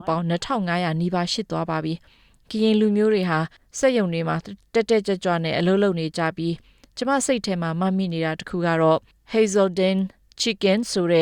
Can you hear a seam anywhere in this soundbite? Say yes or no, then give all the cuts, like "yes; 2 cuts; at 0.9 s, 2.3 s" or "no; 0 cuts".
no; 0 cuts